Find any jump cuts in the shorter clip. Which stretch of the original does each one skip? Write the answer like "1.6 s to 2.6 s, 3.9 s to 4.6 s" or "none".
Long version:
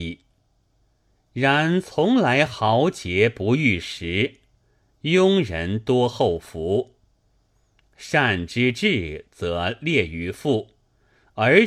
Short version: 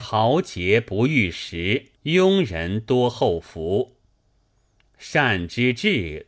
4.4 s to 4.9 s